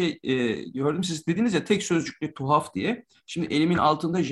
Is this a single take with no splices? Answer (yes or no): yes